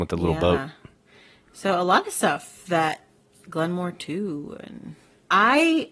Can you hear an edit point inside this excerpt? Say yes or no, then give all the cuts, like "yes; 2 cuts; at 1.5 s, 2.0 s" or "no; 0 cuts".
no; 0 cuts